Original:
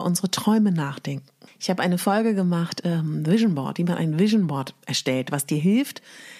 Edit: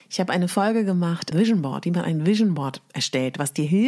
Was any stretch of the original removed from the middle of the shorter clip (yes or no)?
yes